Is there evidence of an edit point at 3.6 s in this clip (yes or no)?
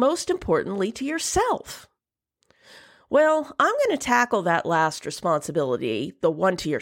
no